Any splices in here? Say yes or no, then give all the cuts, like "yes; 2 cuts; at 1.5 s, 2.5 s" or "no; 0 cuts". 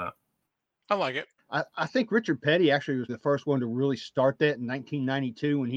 yes; 2 cuts; at 1.4 s, 3.1 s